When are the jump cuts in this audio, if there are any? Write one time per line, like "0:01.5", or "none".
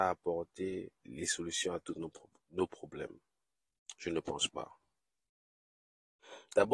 0:01.0